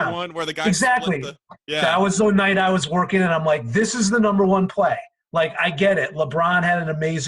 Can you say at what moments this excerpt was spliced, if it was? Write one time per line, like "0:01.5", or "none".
none